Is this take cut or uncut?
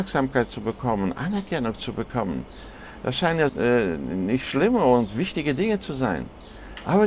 cut